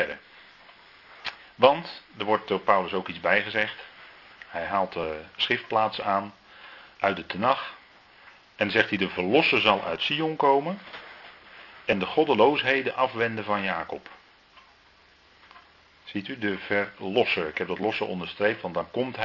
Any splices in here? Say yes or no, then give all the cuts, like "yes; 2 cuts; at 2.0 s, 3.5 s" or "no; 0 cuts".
no; 0 cuts